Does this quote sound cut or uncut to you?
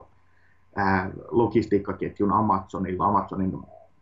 cut